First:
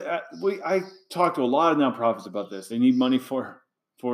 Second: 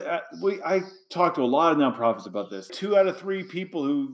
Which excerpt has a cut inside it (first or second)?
second